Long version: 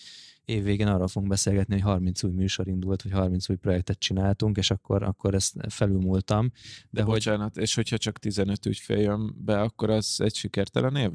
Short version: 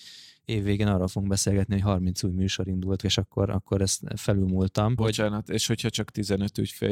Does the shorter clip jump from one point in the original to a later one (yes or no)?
yes